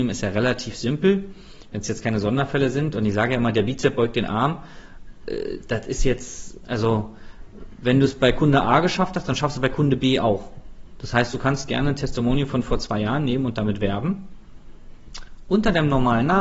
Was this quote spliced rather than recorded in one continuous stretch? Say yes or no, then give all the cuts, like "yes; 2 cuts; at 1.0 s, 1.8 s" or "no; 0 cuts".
no; 0 cuts